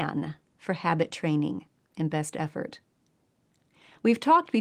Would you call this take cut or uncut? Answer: uncut